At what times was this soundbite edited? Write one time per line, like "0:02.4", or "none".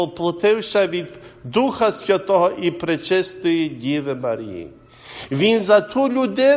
none

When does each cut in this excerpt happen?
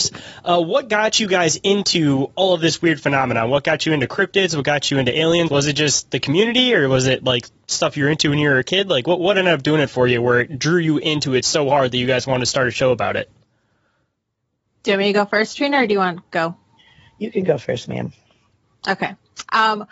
0:05.5

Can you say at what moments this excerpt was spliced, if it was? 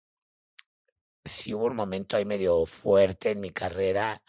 none

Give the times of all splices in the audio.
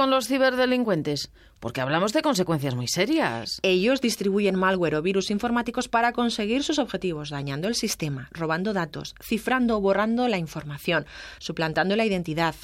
none

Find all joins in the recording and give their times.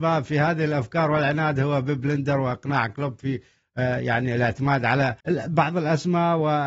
0:05.2

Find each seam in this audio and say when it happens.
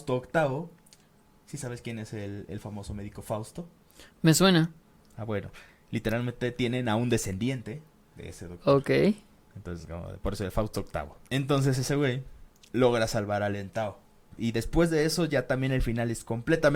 0:11.3
0:14.4

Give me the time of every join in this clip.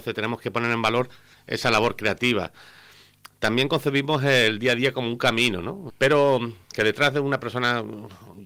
0:05.9

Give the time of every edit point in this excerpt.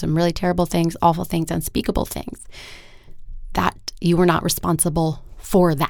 none

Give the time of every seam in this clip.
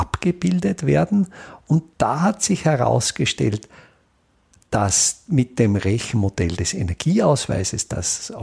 none

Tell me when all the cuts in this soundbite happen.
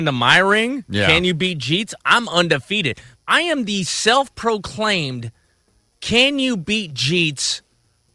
0:03.1

